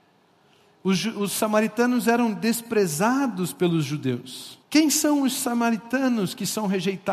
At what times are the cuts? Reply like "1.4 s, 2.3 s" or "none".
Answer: 4.6 s